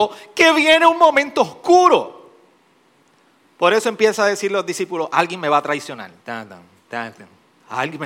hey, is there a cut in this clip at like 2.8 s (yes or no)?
no